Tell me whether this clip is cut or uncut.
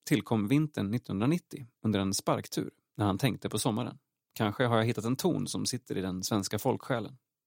cut